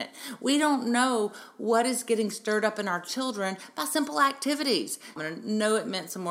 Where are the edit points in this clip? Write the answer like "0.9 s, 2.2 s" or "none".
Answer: 5.2 s